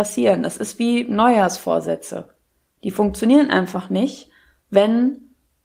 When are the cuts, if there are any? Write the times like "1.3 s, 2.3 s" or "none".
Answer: none